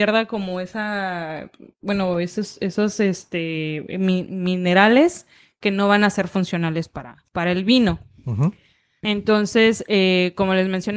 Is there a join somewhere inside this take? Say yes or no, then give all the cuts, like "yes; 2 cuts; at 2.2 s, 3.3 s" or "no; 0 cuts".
yes; 2 cuts; at 7.3 s, 9.0 s